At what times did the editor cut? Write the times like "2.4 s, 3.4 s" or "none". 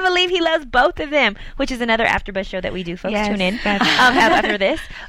none